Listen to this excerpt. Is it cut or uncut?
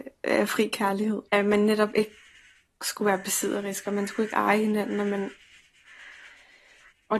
cut